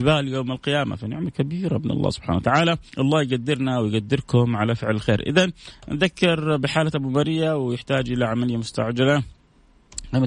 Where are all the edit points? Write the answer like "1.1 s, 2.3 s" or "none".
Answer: 2.9 s